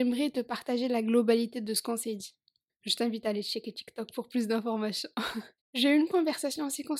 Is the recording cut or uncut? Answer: cut